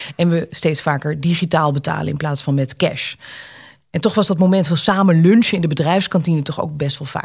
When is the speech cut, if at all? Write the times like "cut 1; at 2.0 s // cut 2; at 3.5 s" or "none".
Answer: none

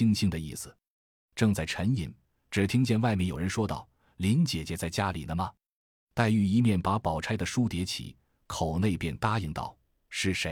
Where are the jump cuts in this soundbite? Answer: none

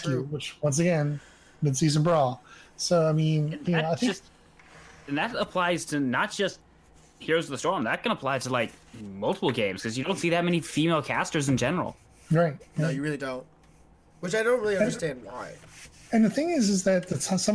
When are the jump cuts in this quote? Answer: none

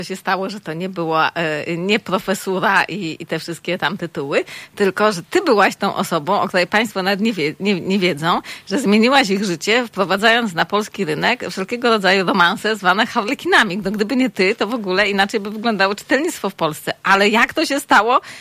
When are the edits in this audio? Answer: none

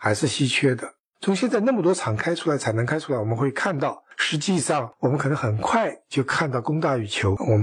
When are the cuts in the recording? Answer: cut 1; at 1.1 s

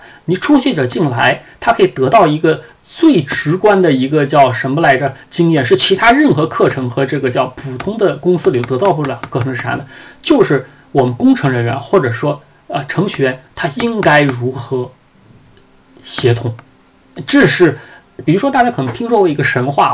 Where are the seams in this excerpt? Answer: cut 1; at 18.2 s

